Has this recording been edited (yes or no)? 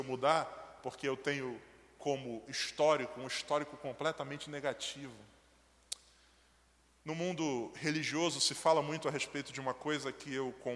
no